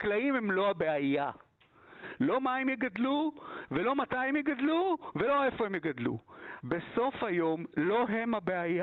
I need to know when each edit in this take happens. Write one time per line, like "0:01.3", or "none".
0:06.6

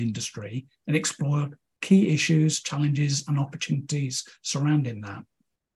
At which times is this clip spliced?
none

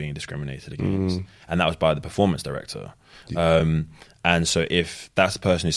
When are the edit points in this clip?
none

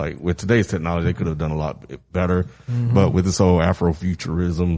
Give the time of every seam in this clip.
none

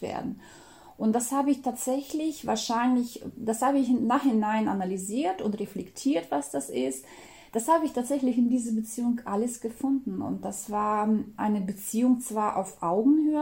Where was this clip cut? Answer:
none

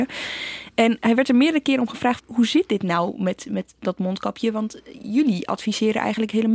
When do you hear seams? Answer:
0:02.2

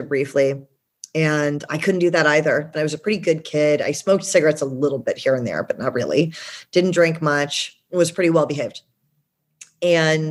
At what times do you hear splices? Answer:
0:02.7

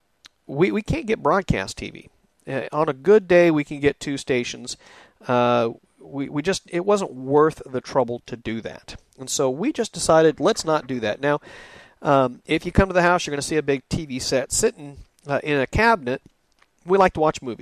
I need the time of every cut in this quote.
none

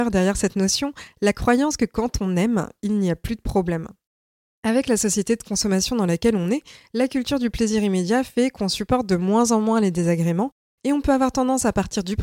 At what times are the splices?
none

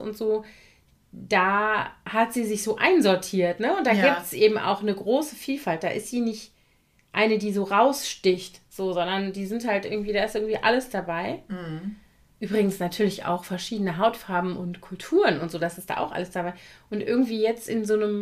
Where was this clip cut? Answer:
none

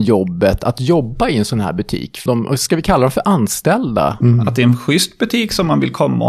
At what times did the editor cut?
0:02.3
0:04.2

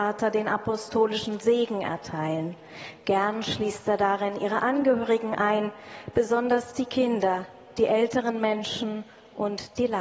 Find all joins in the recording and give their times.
none

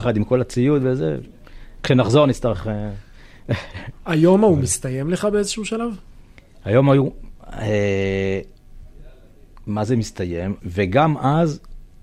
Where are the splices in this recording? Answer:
0:10.6

